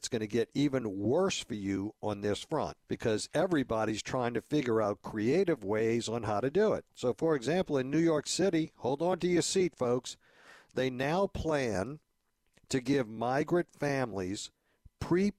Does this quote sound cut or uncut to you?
cut